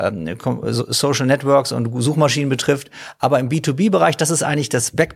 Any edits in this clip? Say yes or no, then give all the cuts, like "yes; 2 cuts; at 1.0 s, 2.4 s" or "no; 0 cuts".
no; 0 cuts